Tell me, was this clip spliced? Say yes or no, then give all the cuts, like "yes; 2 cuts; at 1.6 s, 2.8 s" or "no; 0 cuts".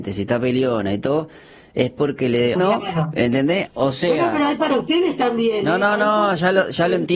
yes; 2 cuts; at 2.6 s, 3.7 s